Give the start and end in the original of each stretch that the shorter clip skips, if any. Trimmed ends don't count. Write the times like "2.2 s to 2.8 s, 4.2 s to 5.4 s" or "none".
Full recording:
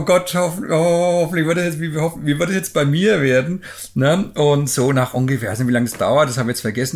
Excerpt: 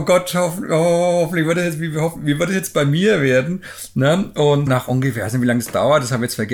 4.7 s to 4.9 s